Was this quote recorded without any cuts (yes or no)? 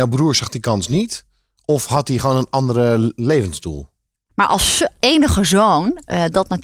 no